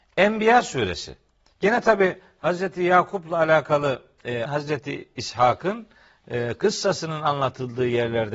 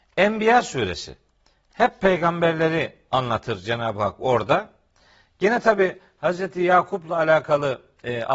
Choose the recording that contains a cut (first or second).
first